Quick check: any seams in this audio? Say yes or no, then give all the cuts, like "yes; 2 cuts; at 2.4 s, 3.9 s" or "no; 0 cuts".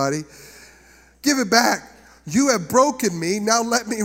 no; 0 cuts